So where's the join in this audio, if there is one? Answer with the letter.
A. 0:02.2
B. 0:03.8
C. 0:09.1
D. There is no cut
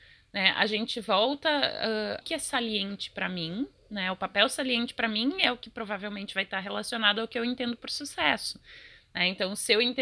A